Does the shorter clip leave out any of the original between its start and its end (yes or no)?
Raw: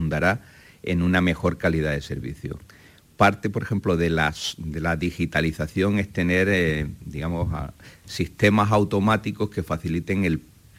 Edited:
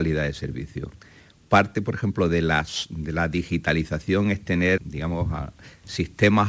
yes